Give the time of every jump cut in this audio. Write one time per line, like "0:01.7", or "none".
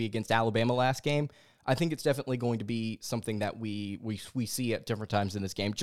none